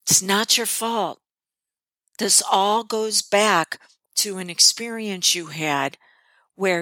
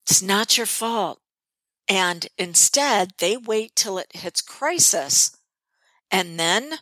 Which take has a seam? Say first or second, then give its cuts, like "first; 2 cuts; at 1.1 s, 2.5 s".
second; 1 cut; at 1.8 s